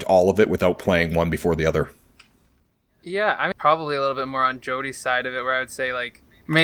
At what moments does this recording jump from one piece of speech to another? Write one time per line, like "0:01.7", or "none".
0:03.5